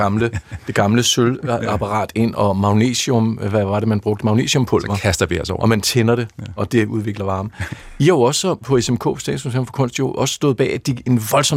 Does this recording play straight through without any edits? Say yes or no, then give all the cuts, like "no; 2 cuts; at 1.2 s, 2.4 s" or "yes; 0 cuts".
yes; 0 cuts